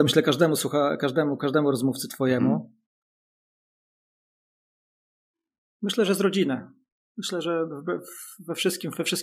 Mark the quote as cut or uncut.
uncut